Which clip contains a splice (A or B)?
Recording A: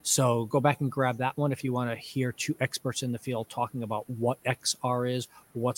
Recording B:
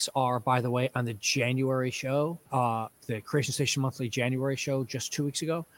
B